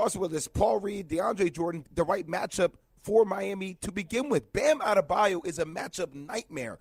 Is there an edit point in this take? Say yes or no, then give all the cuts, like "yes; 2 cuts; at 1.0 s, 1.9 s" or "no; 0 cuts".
yes; 1 cut; at 1.8 s